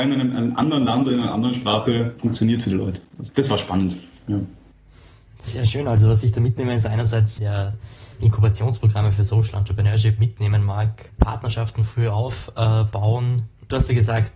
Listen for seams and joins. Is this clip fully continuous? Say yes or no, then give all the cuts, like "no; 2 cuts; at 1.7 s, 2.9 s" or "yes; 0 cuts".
no; 1 cut; at 7.4 s